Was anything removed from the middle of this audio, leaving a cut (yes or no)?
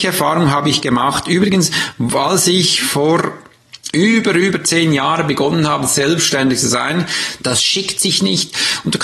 yes